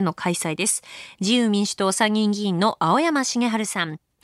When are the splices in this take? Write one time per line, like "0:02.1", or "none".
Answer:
0:01.2